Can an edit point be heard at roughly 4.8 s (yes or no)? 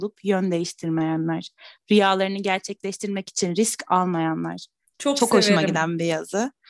yes